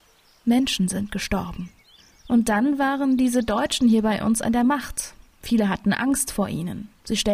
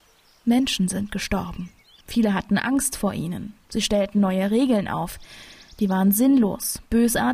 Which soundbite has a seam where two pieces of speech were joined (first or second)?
second